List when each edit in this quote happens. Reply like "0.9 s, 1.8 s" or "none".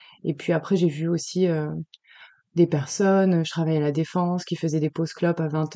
none